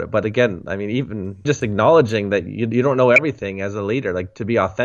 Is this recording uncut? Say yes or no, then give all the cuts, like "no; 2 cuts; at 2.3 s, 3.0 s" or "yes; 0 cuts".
no; 1 cut; at 1.5 s